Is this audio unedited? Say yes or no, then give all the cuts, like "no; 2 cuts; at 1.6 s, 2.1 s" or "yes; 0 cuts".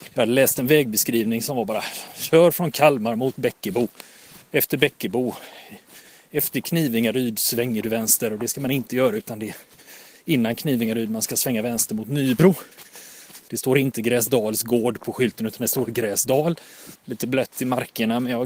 no; 2 cuts; at 13.5 s, 16.9 s